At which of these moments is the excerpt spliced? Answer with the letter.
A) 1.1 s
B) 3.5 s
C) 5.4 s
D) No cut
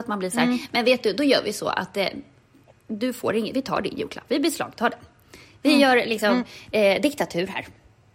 D